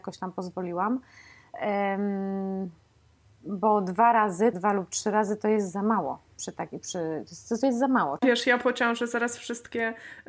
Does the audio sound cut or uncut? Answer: cut